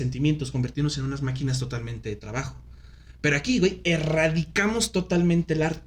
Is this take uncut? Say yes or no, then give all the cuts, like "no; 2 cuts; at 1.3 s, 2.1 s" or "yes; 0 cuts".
yes; 0 cuts